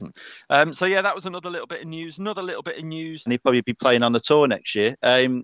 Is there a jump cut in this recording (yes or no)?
yes